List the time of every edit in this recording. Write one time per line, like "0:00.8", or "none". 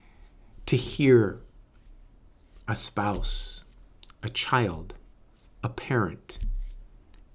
none